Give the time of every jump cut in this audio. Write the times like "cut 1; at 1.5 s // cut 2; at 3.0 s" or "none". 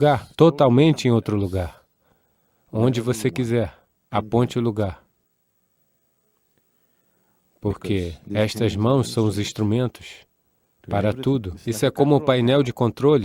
none